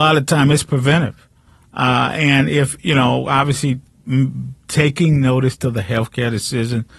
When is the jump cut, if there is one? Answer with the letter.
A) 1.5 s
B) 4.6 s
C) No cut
B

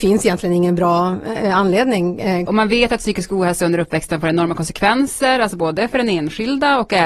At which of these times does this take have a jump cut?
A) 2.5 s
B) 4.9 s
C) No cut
A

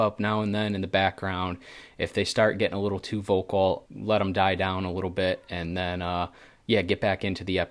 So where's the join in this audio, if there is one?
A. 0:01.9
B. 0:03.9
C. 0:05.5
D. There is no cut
B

